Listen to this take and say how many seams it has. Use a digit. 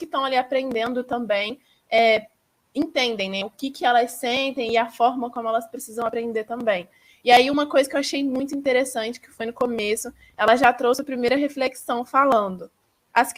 0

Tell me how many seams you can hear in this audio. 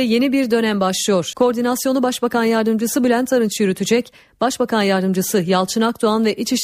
1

